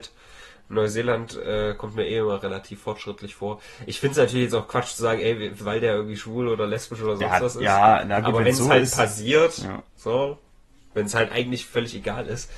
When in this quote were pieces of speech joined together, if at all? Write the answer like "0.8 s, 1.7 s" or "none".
5.6 s